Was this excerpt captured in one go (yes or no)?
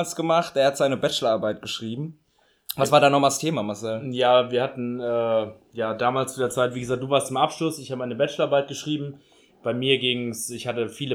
yes